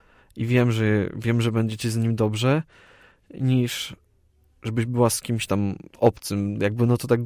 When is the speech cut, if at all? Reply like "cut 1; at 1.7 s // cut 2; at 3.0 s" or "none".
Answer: cut 1; at 5.9 s